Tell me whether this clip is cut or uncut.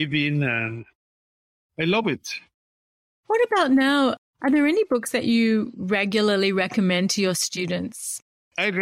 uncut